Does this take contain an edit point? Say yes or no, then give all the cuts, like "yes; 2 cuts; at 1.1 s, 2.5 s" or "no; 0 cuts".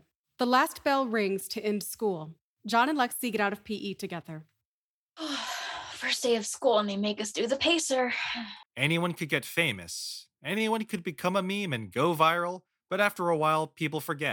yes; 1 cut; at 8.6 s